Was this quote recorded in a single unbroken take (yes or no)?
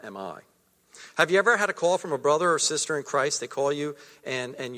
yes